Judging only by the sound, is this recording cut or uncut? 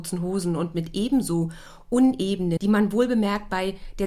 cut